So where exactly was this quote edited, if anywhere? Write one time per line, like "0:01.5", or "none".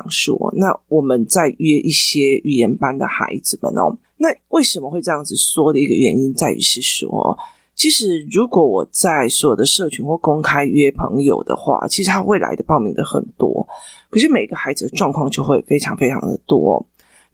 none